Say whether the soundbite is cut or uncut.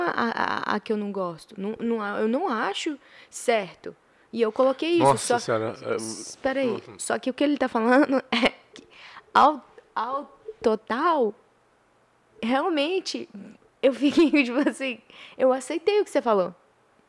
cut